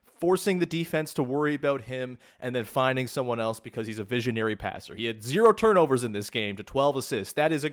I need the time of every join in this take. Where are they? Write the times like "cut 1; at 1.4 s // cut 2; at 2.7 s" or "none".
none